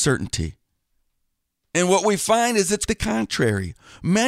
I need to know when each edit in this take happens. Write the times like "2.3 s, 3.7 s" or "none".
2.9 s